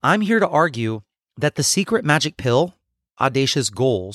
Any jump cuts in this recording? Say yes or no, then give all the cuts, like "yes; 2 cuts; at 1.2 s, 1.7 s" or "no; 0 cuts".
yes; 1 cut; at 3.2 s